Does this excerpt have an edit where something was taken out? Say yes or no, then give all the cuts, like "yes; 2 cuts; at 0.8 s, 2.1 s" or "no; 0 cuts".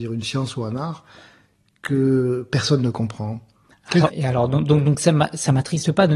yes; 1 cut; at 4.1 s